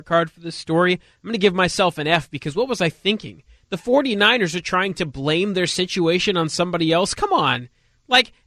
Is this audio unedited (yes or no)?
yes